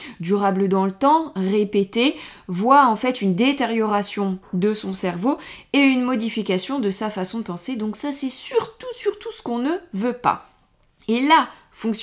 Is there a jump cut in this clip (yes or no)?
no